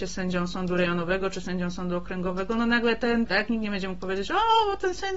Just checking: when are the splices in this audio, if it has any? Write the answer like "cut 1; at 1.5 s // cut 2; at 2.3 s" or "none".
cut 1; at 3.3 s